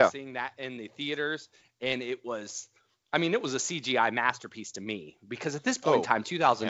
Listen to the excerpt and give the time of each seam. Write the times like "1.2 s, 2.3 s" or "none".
1.7 s